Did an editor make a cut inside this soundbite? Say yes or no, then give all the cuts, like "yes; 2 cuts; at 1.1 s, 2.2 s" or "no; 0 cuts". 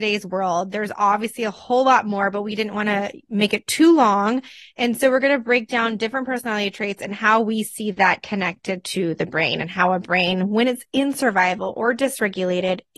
no; 0 cuts